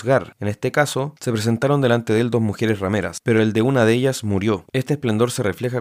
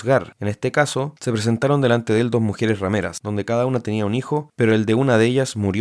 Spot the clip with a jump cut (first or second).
first